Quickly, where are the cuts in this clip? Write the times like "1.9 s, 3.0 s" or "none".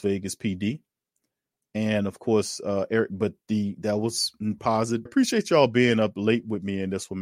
5.1 s